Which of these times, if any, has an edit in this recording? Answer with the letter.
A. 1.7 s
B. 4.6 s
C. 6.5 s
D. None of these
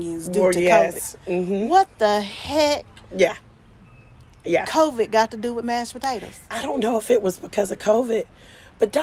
C